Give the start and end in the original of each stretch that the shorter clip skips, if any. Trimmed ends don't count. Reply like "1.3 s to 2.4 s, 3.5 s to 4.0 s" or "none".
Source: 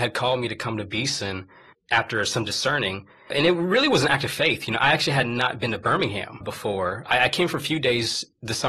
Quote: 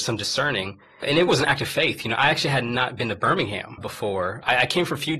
3.5 s to 3.9 s